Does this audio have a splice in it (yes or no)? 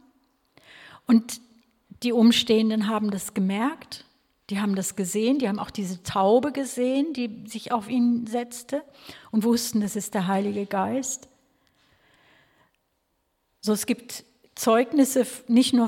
no